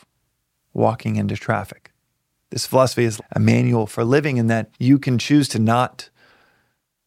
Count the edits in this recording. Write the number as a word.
two